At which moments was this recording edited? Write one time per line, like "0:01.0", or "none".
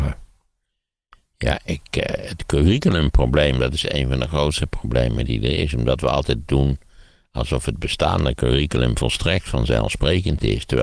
none